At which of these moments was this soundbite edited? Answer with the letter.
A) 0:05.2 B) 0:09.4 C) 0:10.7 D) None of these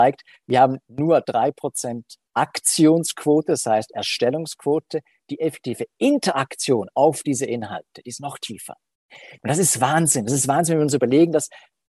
B